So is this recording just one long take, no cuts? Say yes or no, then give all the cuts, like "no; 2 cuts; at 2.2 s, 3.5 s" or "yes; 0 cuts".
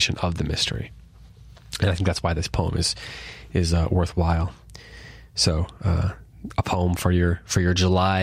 yes; 0 cuts